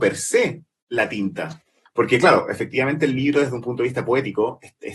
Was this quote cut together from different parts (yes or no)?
yes